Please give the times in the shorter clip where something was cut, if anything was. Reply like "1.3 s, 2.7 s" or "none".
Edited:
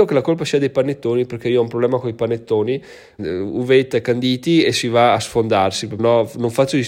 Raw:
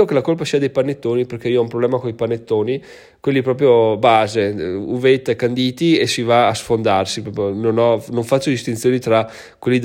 3.2 s, 6.0 s